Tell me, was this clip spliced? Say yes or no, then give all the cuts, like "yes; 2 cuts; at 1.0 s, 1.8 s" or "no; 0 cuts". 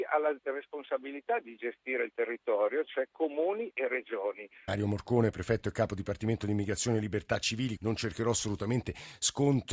yes; 2 cuts; at 4.7 s, 7.8 s